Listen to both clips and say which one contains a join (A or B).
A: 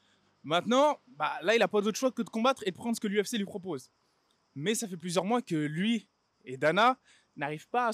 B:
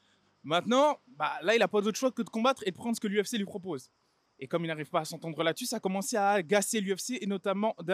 B